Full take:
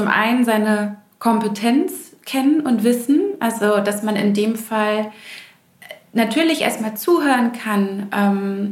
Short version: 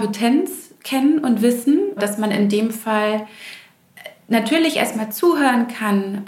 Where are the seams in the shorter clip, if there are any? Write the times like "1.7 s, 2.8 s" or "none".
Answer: 2.0 s